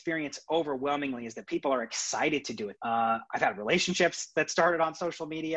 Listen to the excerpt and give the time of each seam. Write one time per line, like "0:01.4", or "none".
0:02.8